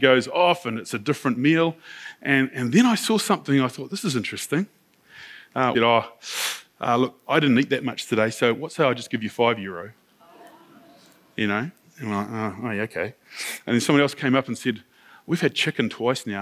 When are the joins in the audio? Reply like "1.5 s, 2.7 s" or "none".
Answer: 5.7 s